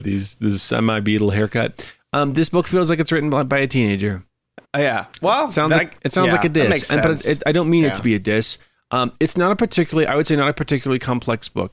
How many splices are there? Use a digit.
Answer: 0